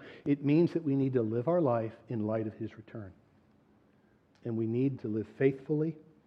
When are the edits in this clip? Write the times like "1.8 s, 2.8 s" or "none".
5.0 s